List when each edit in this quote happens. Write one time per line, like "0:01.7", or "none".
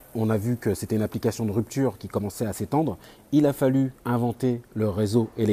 0:04.0